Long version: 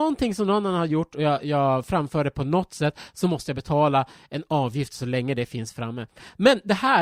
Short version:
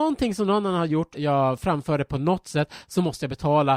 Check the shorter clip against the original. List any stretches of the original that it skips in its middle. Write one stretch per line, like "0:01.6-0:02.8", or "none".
0:01.1-0:01.4